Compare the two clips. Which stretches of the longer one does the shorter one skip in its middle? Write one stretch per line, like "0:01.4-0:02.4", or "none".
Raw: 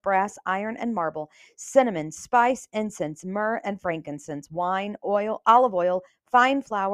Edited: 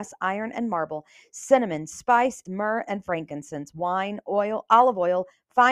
0:02.7-0:03.2